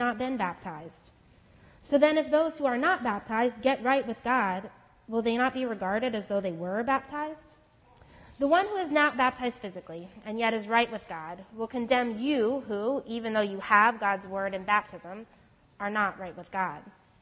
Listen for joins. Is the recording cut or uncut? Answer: uncut